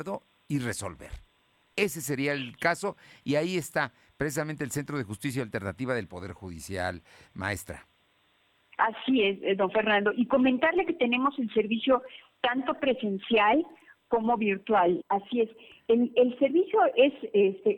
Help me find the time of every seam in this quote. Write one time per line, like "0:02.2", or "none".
0:15.0